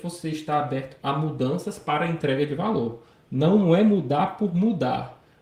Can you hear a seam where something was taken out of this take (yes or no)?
no